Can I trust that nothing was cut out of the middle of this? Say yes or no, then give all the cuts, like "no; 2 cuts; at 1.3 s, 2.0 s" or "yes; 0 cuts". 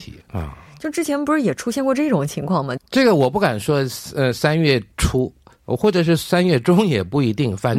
no; 1 cut; at 2.8 s